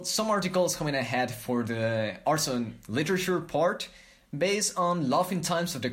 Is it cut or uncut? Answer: uncut